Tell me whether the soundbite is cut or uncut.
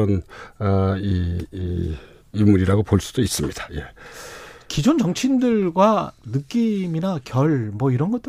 uncut